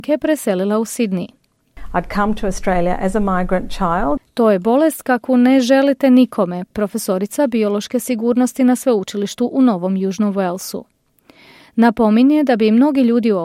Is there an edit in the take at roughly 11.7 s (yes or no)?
no